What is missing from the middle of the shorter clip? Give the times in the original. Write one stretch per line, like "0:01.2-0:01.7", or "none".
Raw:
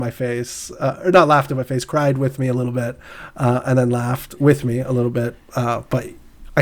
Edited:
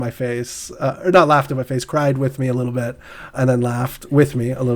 0:03.3-0:03.6